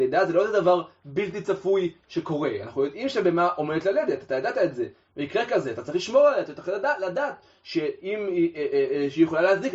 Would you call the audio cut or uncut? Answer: uncut